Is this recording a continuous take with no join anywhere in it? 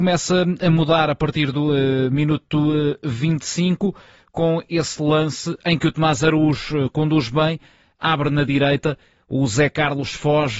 yes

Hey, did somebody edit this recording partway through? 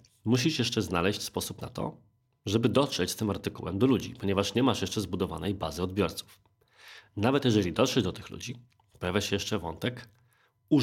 no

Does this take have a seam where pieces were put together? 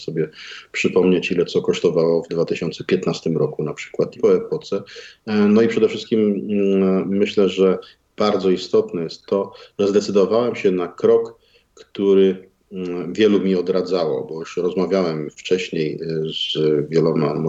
yes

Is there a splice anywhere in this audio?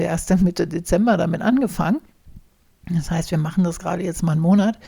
no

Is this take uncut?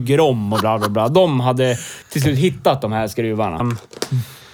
no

